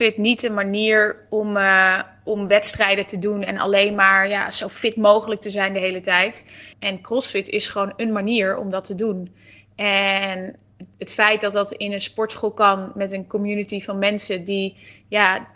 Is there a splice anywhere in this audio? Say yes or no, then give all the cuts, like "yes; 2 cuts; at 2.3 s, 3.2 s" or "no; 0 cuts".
yes; 1 cut; at 6.7 s